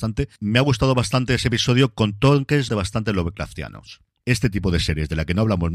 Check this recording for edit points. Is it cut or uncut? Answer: cut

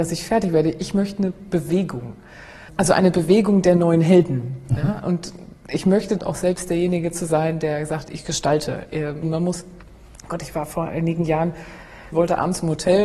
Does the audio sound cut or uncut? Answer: cut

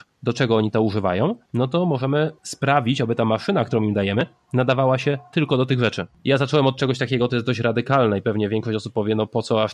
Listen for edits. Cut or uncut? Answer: uncut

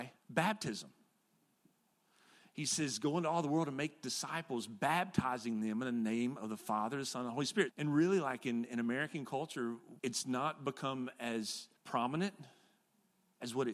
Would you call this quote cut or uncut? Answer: cut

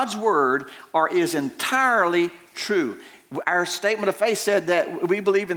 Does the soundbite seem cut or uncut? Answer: uncut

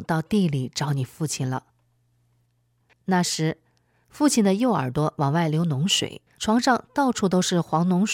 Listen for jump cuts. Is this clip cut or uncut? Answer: cut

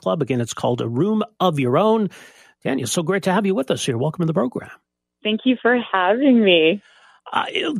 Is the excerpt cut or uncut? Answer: uncut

